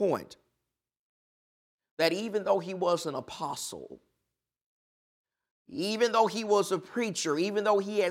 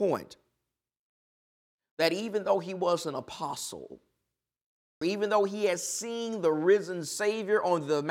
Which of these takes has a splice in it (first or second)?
second